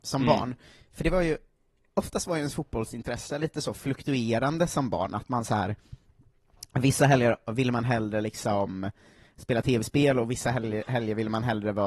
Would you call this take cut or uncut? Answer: uncut